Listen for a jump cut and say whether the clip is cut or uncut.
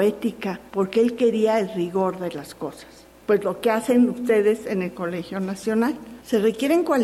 cut